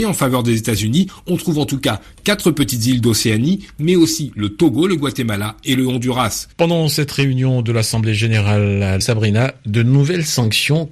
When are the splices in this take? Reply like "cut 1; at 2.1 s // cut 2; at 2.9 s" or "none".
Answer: cut 1; at 6.5 s // cut 2; at 9.0 s

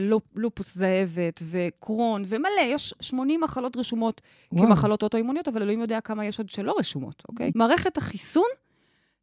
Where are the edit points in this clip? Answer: cut 1; at 7.5 s

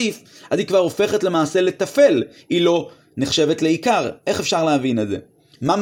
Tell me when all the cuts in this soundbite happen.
none

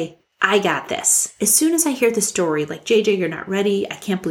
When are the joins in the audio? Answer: none

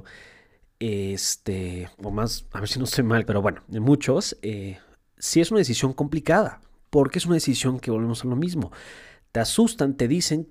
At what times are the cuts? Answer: cut 1; at 3.3 s

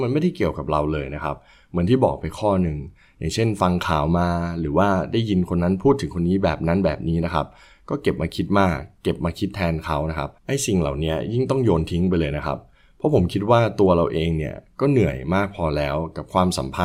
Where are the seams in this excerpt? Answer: cut 1; at 10.4 s

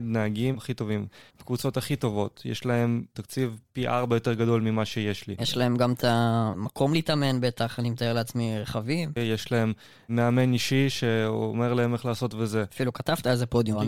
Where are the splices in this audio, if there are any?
cut 1; at 9.2 s

